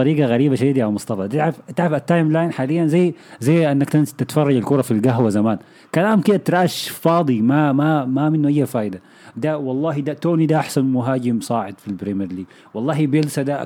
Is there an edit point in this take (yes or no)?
no